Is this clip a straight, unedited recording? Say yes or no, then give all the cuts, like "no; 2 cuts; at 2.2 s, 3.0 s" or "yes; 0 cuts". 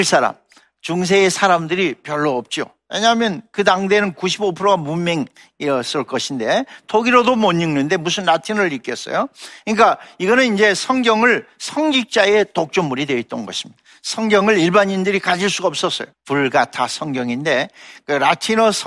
no; 1 cut; at 16.1 s